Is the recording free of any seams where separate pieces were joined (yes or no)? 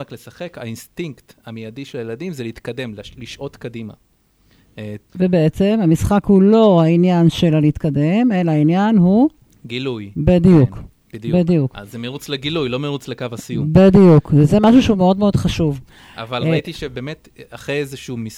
no